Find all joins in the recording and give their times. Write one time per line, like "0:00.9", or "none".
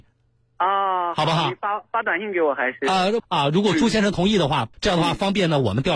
0:03.2
0:04.7